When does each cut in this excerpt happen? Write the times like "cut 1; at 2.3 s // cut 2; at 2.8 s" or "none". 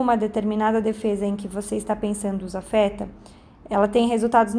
none